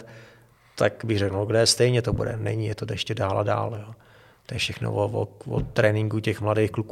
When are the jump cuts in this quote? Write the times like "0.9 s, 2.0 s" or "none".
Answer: none